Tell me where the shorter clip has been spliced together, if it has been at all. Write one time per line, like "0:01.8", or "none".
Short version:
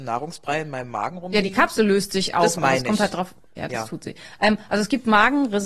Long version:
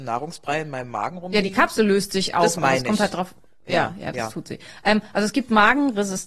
0:03.6